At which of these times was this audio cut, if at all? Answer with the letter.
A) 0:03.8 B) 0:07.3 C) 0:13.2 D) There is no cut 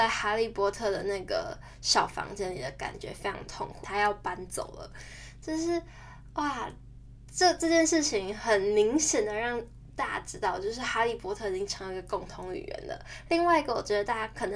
A